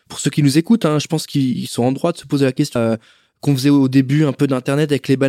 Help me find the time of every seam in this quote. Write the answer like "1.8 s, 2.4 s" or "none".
2.8 s

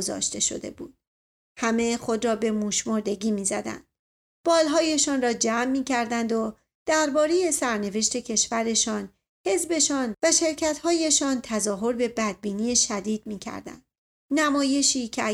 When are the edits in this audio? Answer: 14.2 s

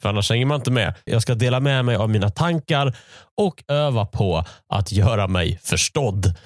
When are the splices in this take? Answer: 1.1 s

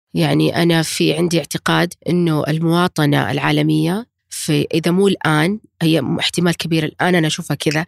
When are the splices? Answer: 2.0 s, 4.2 s

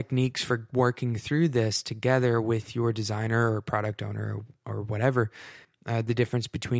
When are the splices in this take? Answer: 5.6 s

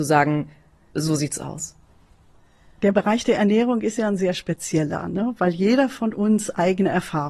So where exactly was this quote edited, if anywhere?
0.9 s

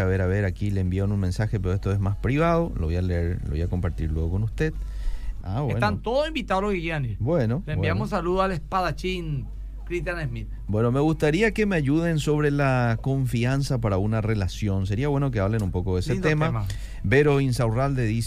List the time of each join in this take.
5.4 s

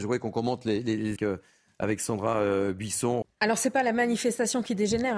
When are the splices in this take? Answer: 1.2 s, 3.2 s

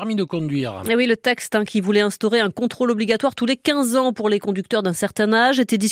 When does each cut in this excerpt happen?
none

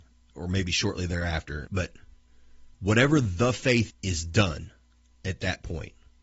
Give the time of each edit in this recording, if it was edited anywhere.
1.7 s, 2.7 s, 3.9 s

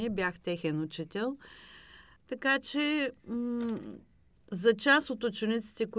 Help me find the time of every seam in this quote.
2.2 s

